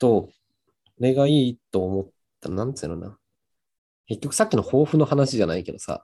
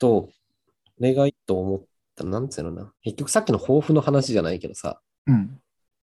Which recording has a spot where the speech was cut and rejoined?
second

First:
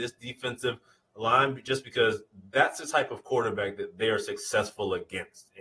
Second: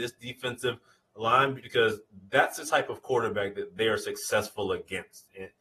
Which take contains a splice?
second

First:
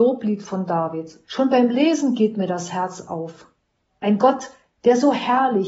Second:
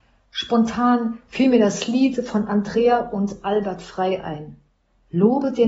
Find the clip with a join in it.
first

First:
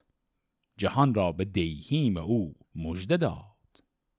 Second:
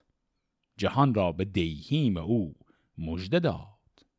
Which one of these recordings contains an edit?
first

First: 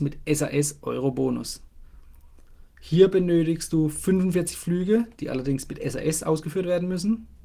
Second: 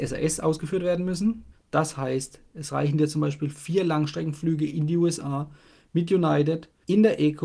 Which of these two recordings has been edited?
second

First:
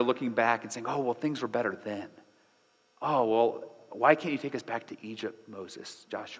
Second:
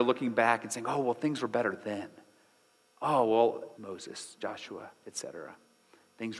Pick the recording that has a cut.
second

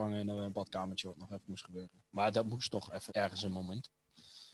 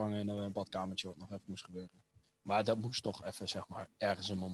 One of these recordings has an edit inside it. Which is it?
first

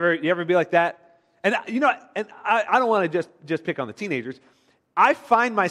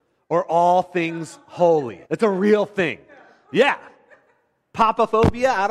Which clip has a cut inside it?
second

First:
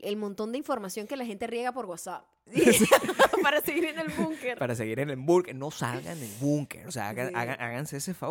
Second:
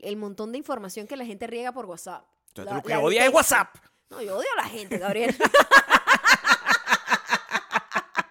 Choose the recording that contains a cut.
first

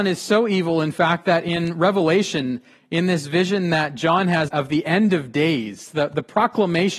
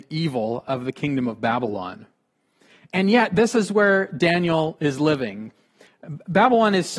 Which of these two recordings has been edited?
first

